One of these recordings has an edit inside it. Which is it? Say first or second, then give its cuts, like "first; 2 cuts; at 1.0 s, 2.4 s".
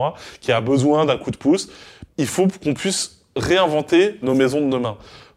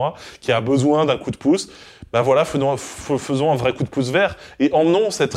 first; 2 cuts; at 2.1 s, 4.2 s